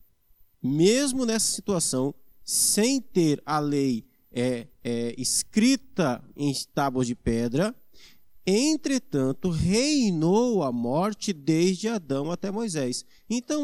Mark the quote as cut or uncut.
uncut